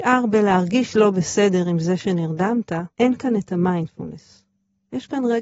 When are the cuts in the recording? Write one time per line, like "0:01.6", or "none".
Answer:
0:02.9